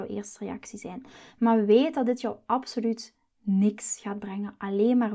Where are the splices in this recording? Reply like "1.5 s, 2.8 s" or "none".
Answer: none